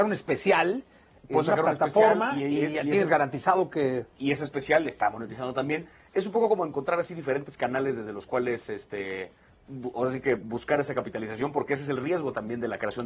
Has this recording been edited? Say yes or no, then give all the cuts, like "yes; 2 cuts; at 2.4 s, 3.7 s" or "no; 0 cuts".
no; 0 cuts